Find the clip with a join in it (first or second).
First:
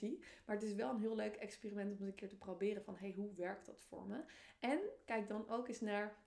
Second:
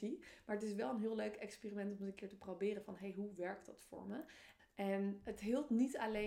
second